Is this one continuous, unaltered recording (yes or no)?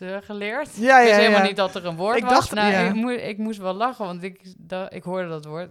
no